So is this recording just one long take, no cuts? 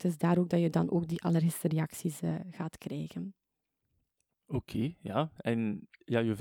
yes; 0 cuts

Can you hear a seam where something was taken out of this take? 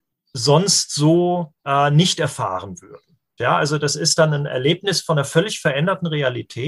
yes; 2 cuts; at 1.6 s, 3.4 s

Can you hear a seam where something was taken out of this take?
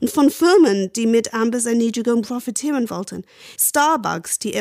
yes; 1 cut; at 3.6 s

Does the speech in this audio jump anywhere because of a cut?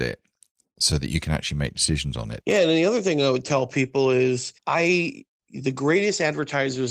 yes; 2 cuts; at 2.4 s, 4.6 s

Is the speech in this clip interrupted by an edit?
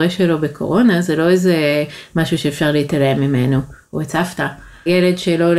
no; 0 cuts

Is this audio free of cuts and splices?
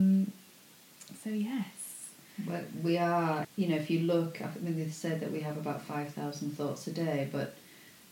no; 1 cut; at 3.4 s

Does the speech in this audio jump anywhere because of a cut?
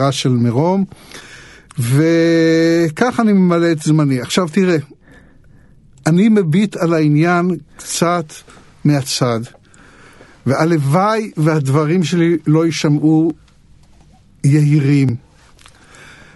no; 0 cuts

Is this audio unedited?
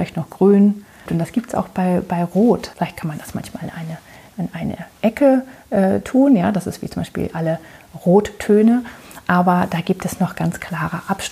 no; 2 cuts; at 1.1 s, 2.7 s

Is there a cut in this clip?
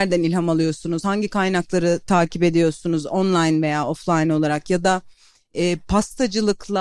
no; 0 cuts

